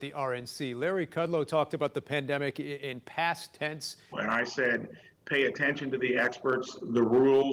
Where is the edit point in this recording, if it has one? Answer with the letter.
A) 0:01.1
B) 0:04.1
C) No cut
B